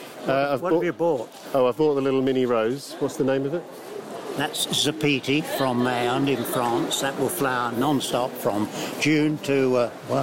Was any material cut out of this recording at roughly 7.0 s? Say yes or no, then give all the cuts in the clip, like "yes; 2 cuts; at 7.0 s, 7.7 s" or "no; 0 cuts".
no; 0 cuts